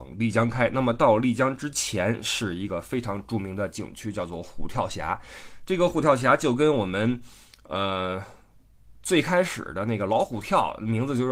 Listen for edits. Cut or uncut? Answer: uncut